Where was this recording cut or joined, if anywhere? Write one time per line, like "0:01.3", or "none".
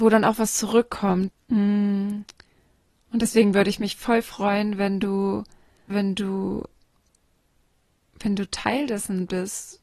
0:01.3
0:05.9